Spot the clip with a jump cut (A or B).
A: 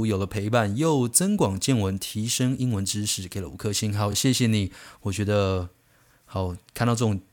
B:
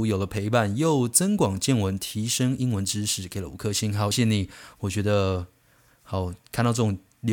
B